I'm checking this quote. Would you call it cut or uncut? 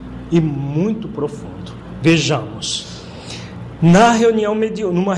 uncut